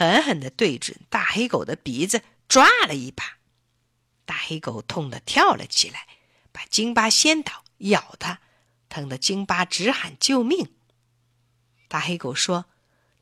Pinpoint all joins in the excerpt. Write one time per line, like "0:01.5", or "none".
0:08.7
0:11.8